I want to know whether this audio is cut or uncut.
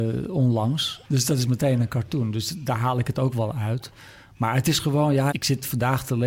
cut